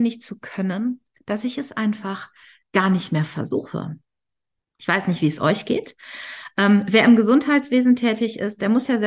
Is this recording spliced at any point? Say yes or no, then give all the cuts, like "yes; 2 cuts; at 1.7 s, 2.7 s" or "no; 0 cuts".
no; 0 cuts